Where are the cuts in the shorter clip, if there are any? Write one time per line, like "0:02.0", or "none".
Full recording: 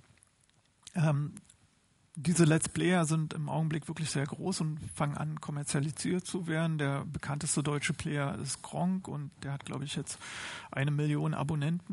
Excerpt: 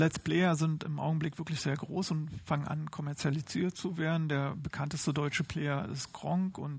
none